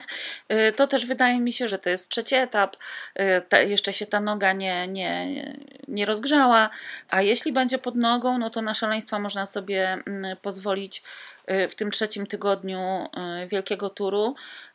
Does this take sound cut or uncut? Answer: cut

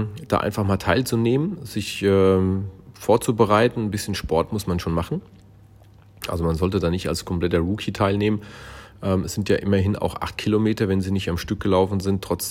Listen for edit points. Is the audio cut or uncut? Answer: uncut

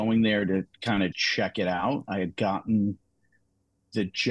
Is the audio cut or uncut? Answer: cut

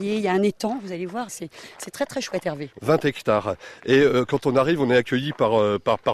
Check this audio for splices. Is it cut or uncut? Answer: cut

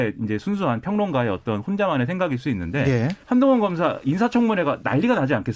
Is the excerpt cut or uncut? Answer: cut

